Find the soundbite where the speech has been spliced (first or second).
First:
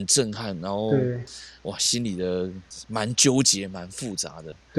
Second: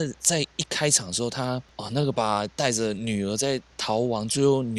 second